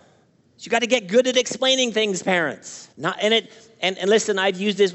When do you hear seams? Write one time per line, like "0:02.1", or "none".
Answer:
0:02.9